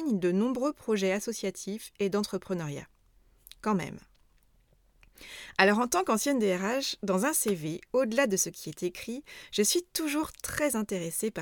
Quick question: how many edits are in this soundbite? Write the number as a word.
zero